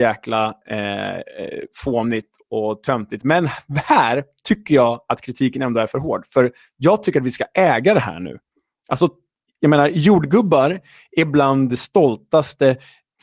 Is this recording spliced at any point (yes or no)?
no